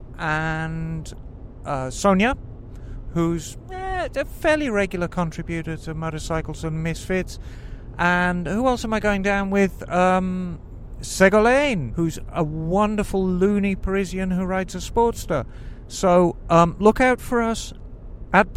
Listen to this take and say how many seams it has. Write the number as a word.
one